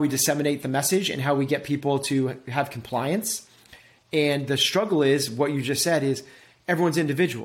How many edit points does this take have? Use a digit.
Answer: 0